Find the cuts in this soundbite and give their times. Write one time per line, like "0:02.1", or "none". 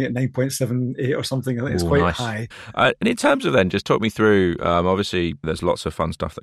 0:02.5